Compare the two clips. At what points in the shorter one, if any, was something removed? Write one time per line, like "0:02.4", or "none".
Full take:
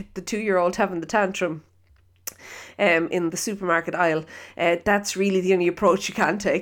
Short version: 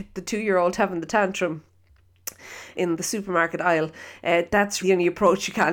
0:02.7
0:04.8